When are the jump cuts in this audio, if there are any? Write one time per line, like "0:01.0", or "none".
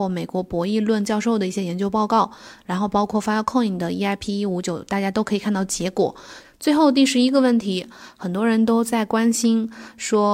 0:06.4

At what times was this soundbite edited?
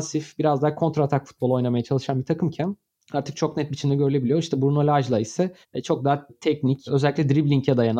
none

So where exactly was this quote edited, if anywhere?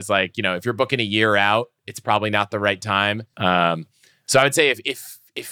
0:03.3

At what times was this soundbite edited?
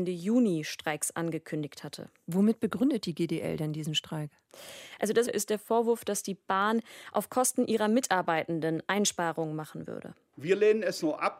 0:05.3

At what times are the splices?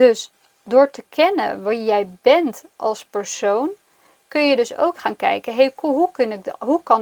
none

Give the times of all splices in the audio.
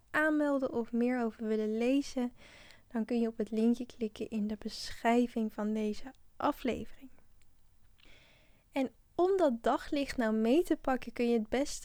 none

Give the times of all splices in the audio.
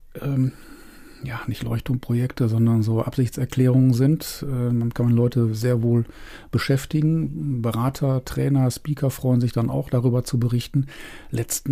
none

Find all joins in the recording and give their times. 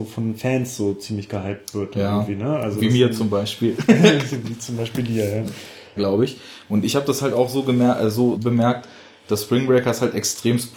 0:06.0
0:08.3

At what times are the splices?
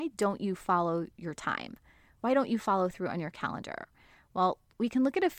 none

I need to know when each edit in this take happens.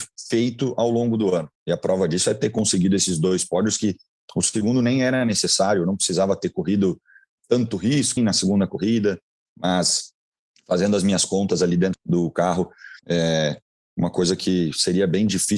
0:08.2
0:11.9
0:13.0

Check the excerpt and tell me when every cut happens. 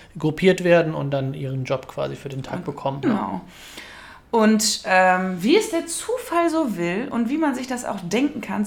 0:03.0

